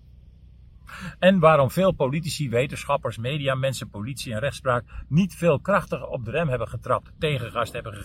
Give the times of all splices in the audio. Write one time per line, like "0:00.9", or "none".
none